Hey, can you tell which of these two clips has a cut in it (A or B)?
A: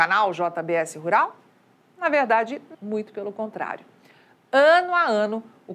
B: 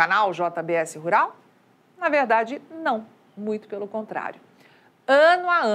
A